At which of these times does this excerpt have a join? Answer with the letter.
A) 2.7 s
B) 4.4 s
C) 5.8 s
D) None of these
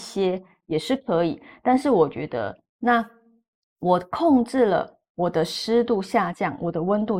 A